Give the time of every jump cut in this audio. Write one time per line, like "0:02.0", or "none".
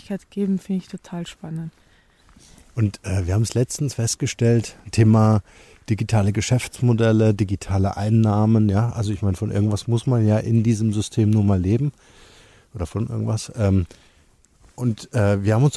none